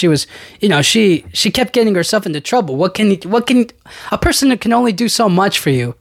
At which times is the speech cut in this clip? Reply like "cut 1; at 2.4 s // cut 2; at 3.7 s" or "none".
none